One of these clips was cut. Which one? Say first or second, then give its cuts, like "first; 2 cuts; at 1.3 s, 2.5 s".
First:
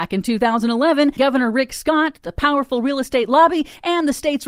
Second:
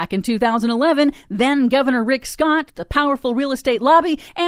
first; 1 cut; at 1.2 s